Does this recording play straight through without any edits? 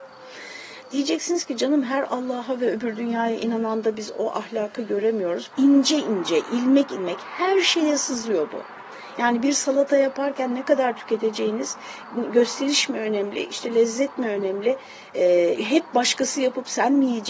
no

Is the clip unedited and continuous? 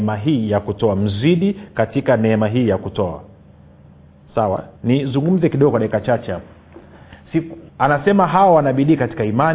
no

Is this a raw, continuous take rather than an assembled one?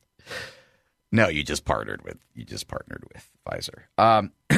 yes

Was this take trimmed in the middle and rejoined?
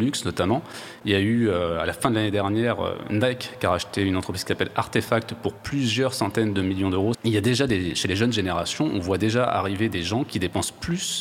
yes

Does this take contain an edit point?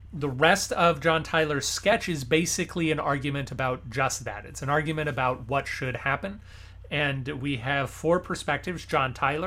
no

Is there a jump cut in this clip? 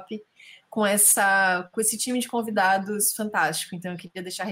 no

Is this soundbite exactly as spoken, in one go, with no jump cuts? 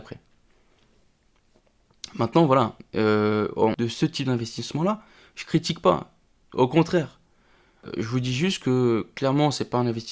no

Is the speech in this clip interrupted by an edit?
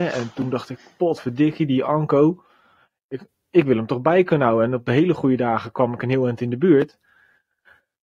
no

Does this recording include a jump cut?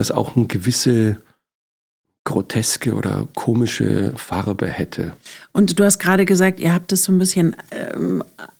no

